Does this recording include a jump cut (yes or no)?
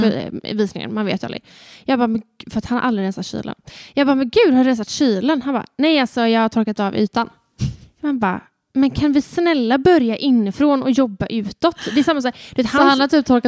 no